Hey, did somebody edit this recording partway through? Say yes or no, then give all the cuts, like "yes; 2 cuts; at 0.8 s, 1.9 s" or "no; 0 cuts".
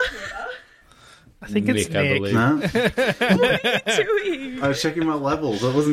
no; 0 cuts